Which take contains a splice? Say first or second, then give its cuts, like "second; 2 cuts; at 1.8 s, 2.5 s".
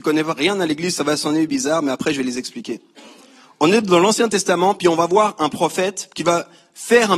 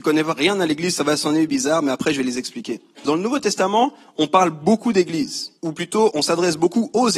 second; 2 cuts; at 3.1 s, 5.6 s